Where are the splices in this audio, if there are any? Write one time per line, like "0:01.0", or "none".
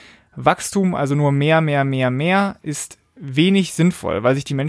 none